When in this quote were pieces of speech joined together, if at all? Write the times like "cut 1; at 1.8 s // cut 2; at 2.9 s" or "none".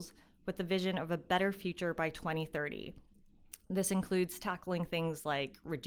none